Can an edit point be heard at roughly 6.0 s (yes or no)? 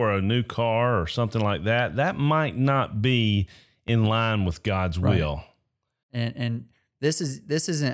yes